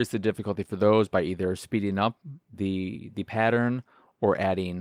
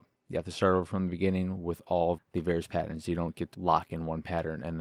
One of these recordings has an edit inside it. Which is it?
second; 2 cuts; at 2.2 s, 3.5 s

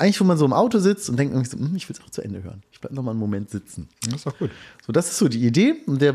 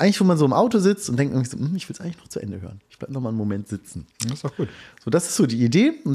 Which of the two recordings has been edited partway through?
first; 1 cut; at 2.0 s

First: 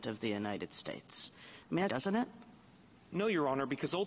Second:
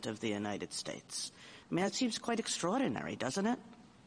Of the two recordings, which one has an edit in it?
first; 1 cut; at 1.9 s

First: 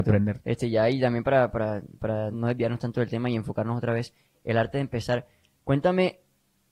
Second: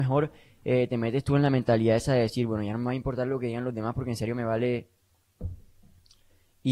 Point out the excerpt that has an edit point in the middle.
first; 1 cut; at 2.3 s

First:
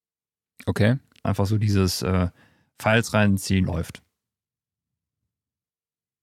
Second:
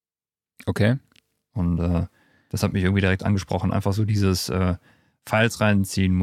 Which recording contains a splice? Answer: first; 2 cuts; at 1.2 s, 3.6 s

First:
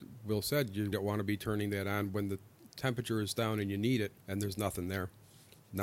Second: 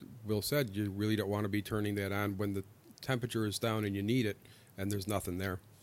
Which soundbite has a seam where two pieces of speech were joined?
first; 2 cuts; at 0.9 s, 4.2 s

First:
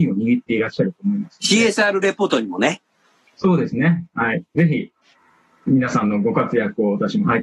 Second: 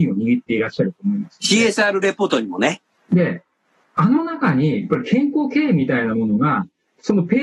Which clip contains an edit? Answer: second; 1 cut; at 3.0 s

